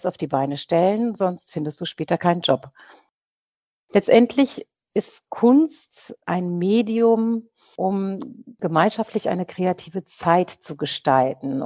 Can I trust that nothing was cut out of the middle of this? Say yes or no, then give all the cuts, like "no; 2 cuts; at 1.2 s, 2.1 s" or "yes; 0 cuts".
no; 1 cut; at 6.2 s